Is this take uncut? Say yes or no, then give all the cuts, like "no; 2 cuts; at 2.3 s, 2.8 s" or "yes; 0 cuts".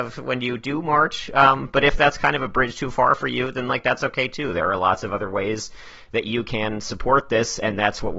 yes; 0 cuts